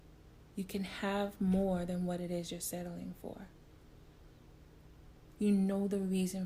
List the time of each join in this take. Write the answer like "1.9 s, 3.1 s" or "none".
5.4 s